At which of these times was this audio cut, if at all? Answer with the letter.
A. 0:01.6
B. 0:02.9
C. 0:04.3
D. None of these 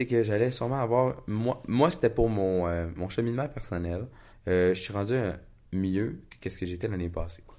C